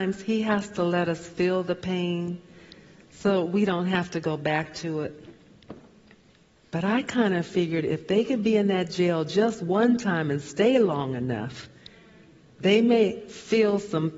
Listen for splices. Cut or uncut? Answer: cut